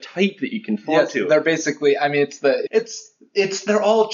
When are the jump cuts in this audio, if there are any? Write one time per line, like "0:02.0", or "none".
0:02.7